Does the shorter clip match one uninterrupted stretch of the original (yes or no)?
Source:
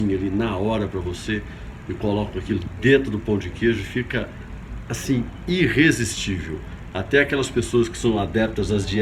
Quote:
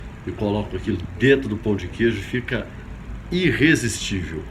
no